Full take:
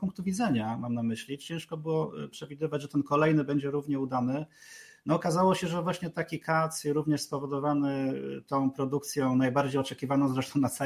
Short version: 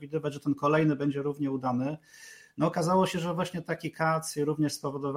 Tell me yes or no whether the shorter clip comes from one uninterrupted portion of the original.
yes